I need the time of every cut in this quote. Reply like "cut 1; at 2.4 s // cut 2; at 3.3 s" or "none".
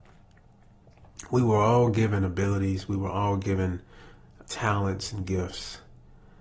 cut 1; at 4.4 s